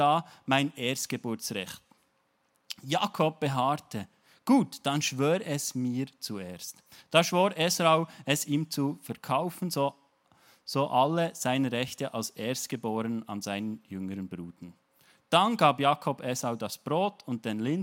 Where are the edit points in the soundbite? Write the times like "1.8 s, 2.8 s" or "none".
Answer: none